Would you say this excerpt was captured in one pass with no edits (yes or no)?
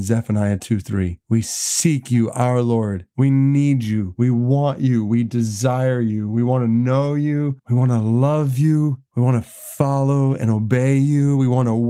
yes